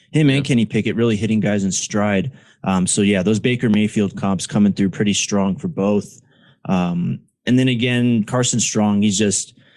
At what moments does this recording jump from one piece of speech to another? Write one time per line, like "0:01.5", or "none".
none